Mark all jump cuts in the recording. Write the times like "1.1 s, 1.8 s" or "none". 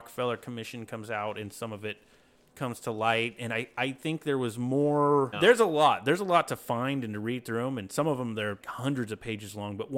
5.3 s, 8.6 s